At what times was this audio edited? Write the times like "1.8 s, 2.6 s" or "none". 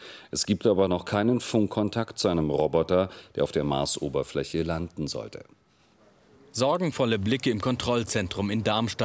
none